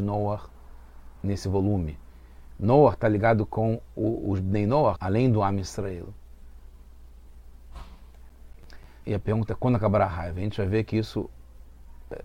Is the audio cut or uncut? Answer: cut